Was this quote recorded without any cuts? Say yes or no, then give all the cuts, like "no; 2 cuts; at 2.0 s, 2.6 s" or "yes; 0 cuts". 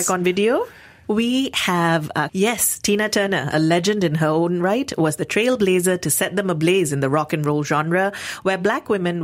no; 2 cuts; at 1.0 s, 2.3 s